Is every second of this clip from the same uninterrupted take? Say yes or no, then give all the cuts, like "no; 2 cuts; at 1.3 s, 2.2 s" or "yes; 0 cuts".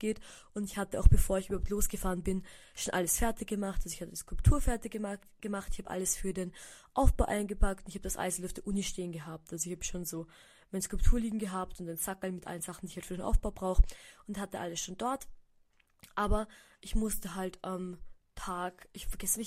yes; 0 cuts